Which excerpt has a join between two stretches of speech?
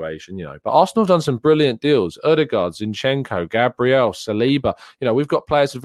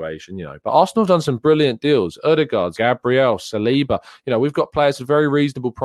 second; 1 cut; at 2.7 s

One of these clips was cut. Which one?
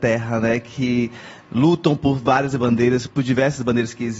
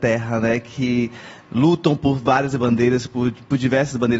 first; 1 cut; at 3.1 s

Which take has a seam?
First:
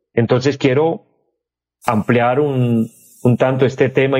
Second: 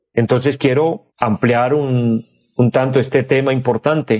second; 1 cut; at 1.1 s

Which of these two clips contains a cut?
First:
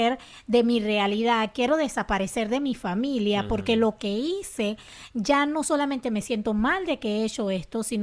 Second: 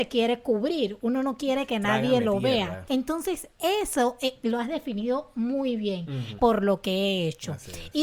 second; 2 cuts; at 2.9 s, 6.4 s

